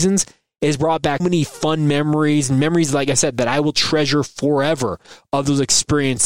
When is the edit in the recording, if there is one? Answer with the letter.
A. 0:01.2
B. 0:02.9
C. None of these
A